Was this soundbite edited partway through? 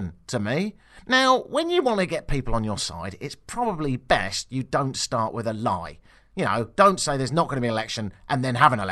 no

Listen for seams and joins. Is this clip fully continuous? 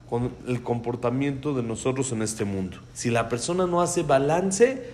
no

